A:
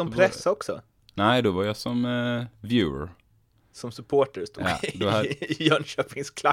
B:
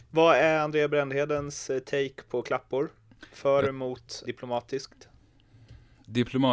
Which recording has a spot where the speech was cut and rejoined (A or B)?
B